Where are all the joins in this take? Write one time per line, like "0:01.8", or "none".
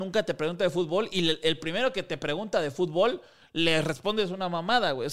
none